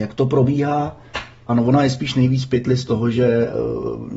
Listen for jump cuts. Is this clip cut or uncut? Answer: cut